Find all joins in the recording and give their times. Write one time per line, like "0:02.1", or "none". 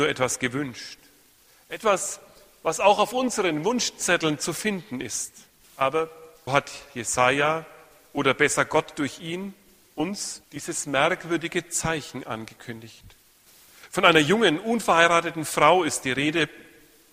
0:06.5
0:10.4